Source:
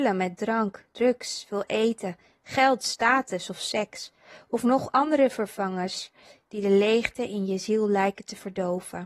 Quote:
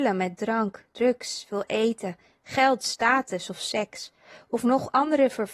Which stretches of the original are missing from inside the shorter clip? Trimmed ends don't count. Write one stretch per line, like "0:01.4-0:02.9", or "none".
none